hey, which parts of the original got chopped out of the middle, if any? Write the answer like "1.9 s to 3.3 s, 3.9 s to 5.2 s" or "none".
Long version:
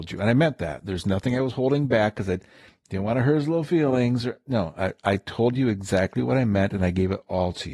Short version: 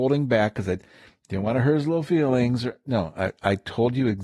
none